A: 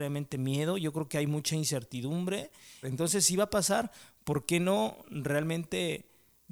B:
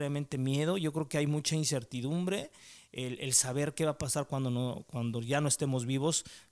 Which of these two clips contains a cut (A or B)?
A